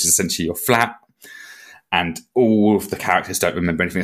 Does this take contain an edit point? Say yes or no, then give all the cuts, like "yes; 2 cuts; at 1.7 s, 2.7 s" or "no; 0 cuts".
no; 0 cuts